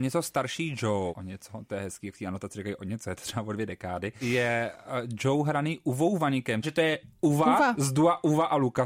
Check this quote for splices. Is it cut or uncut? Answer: cut